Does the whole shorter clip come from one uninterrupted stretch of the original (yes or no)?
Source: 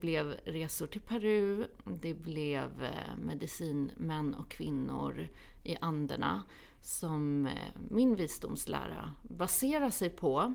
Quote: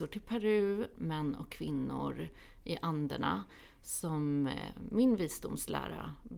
no